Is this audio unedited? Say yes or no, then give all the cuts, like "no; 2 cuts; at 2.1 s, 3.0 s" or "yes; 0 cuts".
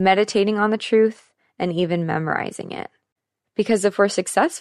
no; 1 cut; at 3.4 s